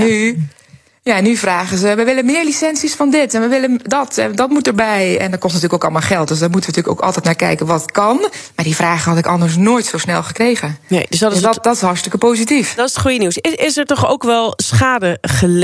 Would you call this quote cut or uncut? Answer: uncut